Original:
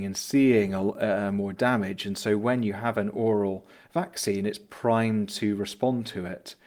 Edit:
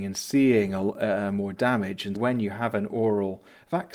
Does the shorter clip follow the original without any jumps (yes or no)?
no